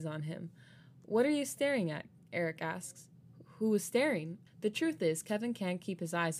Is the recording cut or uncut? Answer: cut